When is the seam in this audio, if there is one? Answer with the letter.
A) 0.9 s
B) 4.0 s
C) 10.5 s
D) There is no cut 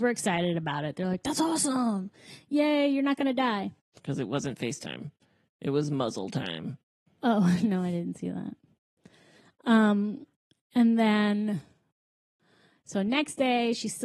B